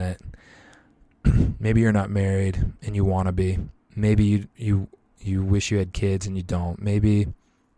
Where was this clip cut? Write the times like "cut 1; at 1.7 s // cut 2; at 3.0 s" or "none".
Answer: none